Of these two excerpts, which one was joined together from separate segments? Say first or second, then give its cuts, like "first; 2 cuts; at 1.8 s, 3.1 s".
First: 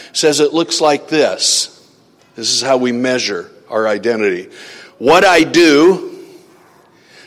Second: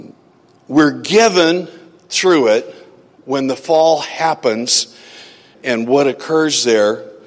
second; 1 cut; at 5.5 s